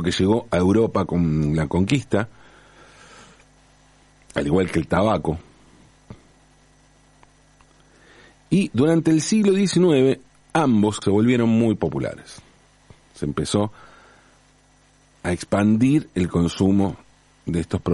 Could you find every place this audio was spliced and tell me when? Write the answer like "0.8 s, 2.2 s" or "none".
11.0 s